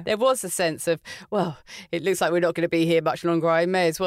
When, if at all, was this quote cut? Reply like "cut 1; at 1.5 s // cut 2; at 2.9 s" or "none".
none